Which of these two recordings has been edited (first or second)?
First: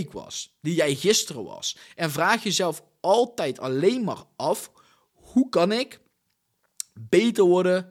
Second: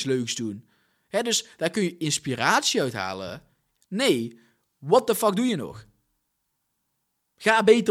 second